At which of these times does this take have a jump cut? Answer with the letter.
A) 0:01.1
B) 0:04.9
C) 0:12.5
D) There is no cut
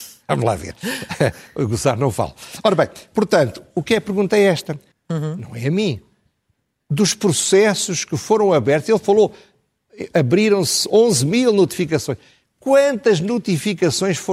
B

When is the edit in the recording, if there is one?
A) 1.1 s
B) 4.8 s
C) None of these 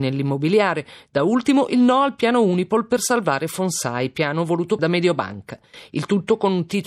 B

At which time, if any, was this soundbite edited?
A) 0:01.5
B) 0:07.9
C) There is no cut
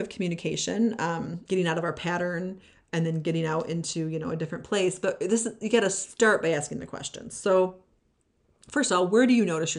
A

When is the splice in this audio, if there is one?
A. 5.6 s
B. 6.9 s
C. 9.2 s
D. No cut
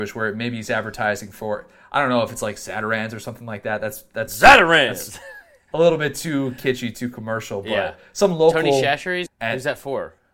C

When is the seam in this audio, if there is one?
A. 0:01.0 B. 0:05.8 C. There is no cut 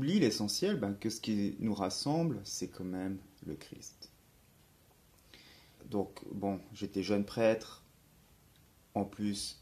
B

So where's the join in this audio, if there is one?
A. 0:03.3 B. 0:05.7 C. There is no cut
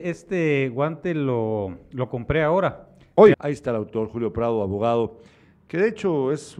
A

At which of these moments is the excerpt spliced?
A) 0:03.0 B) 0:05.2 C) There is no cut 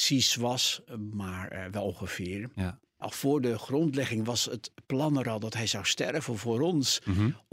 A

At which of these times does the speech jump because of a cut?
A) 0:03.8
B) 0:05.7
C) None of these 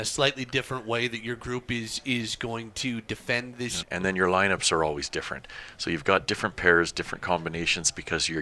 A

